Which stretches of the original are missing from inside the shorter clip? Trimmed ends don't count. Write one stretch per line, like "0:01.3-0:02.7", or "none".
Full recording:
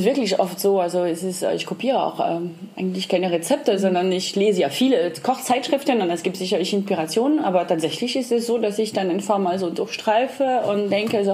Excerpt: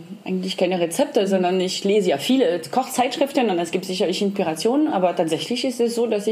none